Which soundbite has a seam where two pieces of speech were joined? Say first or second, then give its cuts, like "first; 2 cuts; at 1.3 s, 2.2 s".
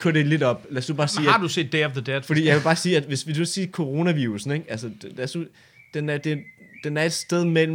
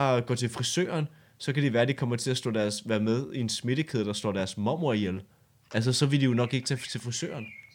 first; 1 cut; at 2.2 s